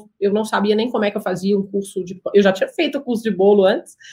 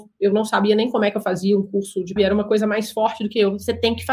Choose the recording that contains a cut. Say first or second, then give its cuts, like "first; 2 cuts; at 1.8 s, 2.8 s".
second; 1 cut; at 2.2 s